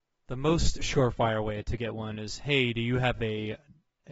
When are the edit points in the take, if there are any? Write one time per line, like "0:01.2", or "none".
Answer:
none